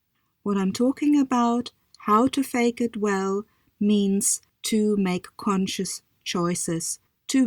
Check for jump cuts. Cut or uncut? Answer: uncut